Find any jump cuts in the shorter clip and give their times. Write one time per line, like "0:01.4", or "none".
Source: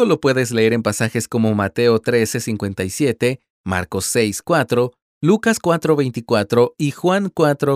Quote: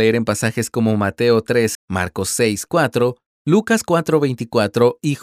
0:01.7